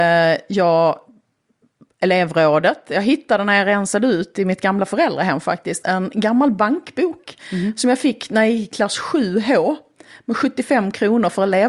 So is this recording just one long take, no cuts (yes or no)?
no